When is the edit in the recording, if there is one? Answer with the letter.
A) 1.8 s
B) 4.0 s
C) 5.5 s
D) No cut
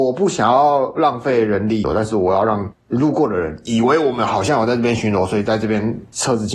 A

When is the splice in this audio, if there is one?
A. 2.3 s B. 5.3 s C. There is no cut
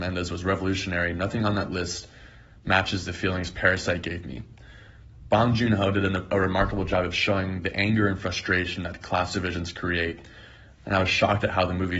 C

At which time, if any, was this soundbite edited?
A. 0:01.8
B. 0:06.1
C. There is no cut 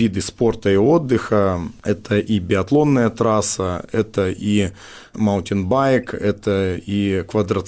C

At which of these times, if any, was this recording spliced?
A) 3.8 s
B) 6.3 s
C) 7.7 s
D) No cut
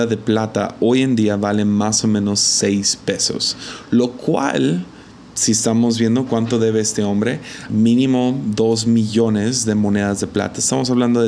C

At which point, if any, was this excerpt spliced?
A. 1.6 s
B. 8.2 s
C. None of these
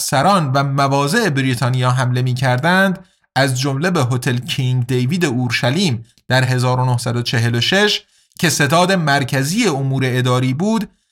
C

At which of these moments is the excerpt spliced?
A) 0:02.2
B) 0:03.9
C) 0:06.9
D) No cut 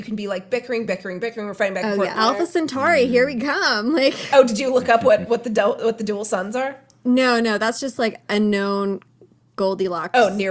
A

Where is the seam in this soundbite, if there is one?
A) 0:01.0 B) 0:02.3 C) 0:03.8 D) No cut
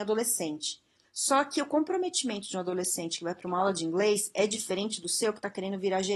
A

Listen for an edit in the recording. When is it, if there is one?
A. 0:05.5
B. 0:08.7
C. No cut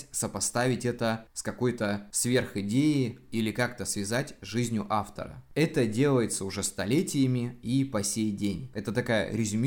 B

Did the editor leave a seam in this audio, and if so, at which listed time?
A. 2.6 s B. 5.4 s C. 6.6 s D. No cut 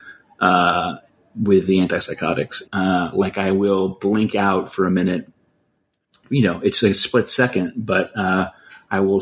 A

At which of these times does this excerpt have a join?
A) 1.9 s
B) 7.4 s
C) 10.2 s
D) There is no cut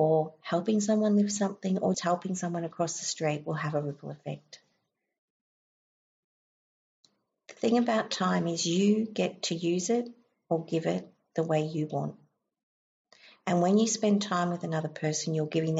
A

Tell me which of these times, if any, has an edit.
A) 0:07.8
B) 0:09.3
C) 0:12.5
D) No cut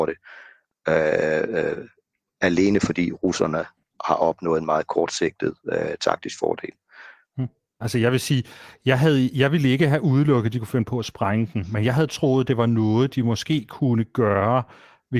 A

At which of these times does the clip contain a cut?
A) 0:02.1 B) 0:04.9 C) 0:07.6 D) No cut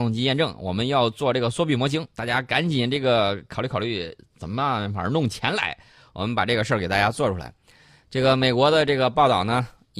D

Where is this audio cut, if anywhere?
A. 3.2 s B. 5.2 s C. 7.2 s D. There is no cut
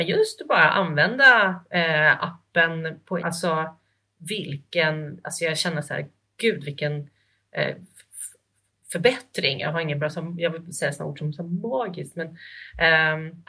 A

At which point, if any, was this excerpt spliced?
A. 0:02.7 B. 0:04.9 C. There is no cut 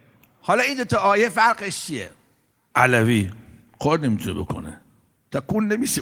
A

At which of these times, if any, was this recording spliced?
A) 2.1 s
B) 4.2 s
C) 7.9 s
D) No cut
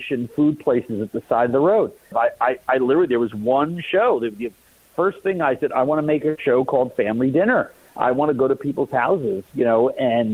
A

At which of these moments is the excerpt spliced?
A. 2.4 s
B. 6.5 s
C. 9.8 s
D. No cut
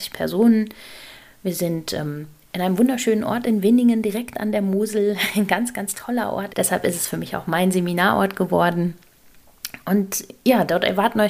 B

